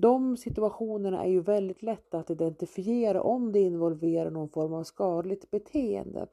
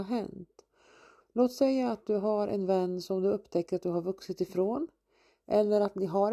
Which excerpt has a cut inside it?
second; 1 cut; at 1.2 s

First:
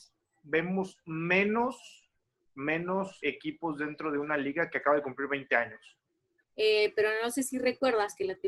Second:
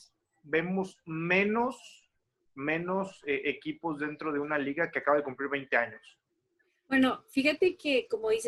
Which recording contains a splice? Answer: first; 2 cuts; at 3.2 s, 6.4 s

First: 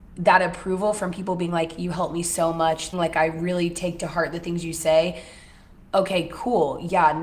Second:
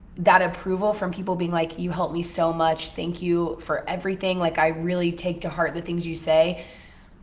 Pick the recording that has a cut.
first; 1 cut; at 2.9 s

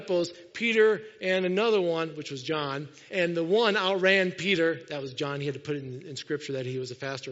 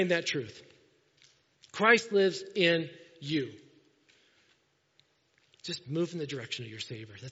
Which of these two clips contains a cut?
first; 1 cut; at 3.1 s

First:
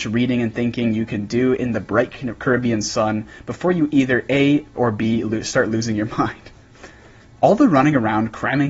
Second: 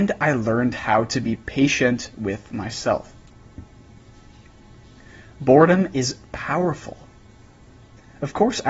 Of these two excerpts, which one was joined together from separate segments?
first; 2 cuts; at 4.8 s, 7.3 s

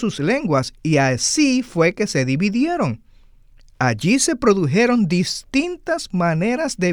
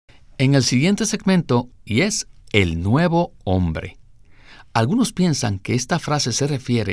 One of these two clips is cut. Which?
second; 1 cut; at 1.7 s

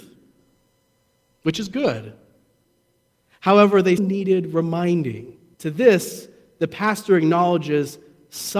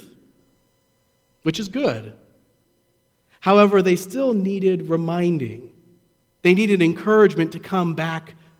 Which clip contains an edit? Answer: first; 2 cuts; at 4.0 s, 5.5 s

